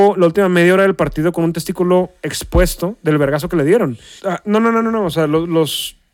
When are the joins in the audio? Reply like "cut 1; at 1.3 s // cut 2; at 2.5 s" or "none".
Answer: cut 1; at 4.2 s